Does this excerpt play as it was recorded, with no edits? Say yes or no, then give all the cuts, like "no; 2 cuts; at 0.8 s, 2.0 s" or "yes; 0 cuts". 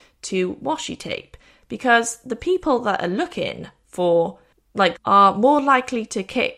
no; 1 cut; at 5.0 s